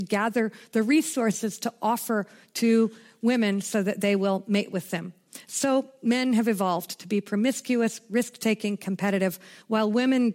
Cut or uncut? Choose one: uncut